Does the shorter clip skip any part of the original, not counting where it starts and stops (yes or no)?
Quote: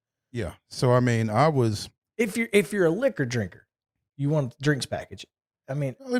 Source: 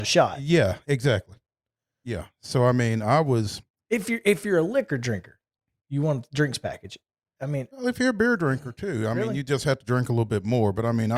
no